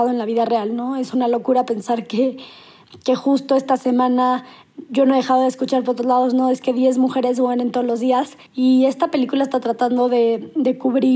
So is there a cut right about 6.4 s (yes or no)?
no